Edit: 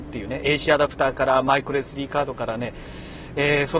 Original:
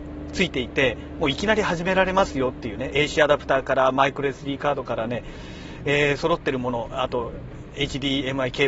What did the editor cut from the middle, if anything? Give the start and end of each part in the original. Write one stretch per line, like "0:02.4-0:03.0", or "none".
none